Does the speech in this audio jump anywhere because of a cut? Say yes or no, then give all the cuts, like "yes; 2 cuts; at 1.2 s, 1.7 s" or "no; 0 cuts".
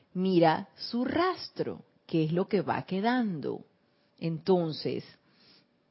yes; 1 cut; at 4.1 s